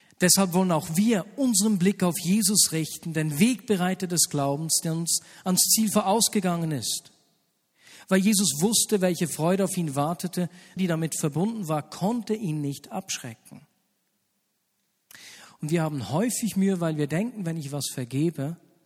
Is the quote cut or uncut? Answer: cut